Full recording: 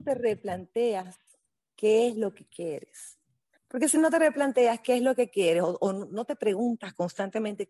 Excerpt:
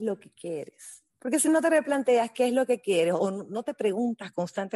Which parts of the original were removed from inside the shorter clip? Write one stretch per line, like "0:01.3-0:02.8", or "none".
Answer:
0:03.2-0:03.6
0:05.7-0:05.8